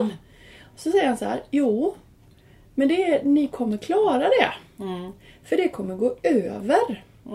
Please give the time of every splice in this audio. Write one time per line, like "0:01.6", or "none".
none